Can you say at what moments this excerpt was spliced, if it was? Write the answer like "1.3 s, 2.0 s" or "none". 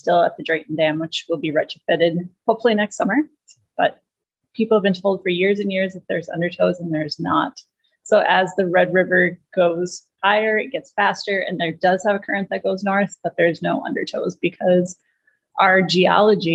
none